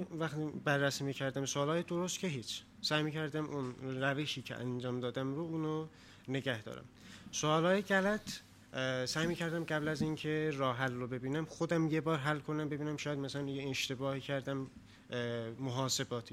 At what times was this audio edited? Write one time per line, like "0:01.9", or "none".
none